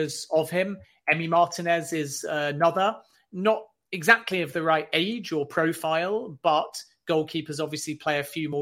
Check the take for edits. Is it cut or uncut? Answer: uncut